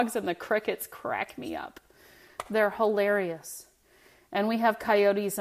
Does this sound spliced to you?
no; 0 cuts

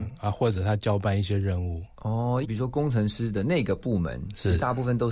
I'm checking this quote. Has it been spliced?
yes; 1 cut; at 2.4 s

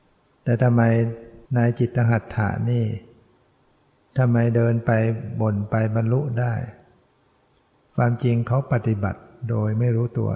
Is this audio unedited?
no; 1 cut; at 1.5 s

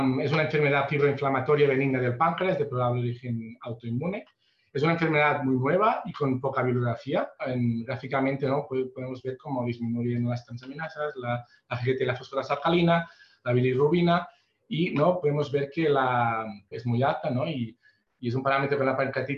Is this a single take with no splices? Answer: no; 3 cuts; at 7.4 s, 15.2 s, 16.7 s

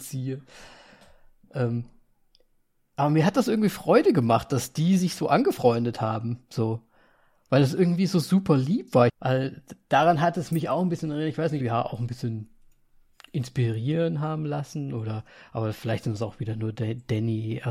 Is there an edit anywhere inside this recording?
yes; 2 cuts; at 9.1 s, 11.6 s

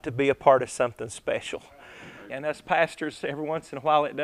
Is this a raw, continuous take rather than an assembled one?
no; 1 cut; at 2.3 s

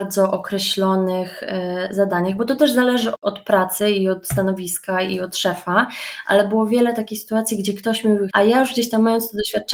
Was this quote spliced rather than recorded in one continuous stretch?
yes; 2 cuts; at 3.1 s, 8.3 s

